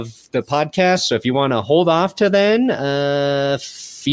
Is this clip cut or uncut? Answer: uncut